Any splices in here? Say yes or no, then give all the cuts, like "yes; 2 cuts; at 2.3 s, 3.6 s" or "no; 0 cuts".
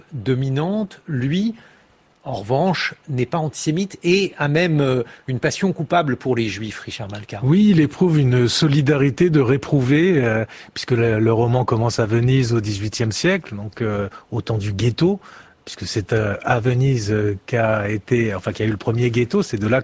no; 0 cuts